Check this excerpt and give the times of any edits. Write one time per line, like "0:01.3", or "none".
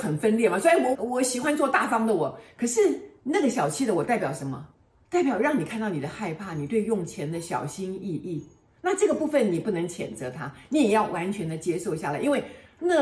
0:00.9

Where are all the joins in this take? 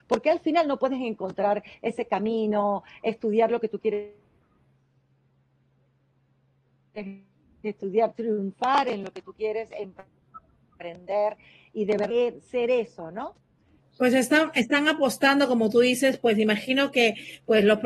0:13.8

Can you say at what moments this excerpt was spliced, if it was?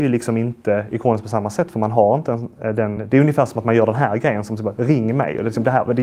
none

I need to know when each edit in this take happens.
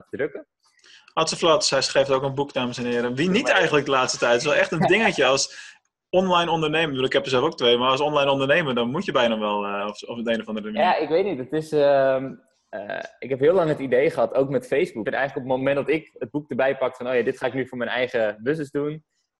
0:15.1

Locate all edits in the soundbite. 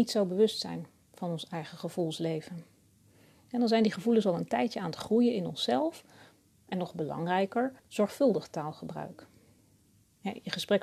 0:06.6
0:07.8

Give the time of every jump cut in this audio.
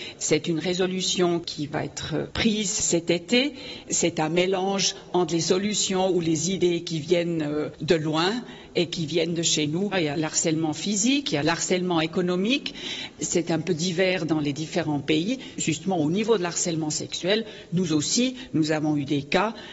0:09.9
0:15.6

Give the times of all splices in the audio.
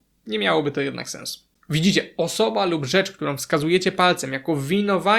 0:01.6

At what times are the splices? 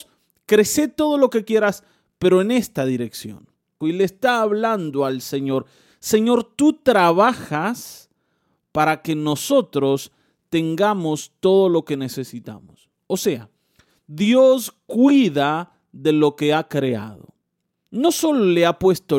0:03.8

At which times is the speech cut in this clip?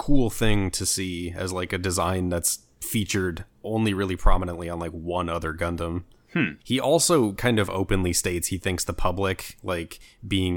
0:06.6

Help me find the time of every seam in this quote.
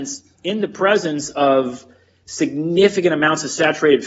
none

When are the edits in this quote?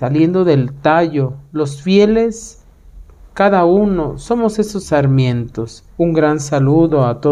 0:06.0

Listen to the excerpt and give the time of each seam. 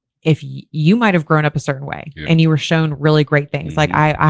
none

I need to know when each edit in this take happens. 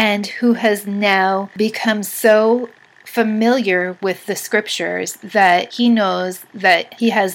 none

